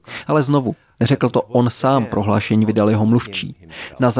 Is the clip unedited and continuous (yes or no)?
yes